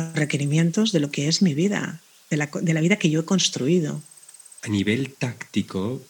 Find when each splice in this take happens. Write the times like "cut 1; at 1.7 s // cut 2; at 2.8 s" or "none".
cut 1; at 4.6 s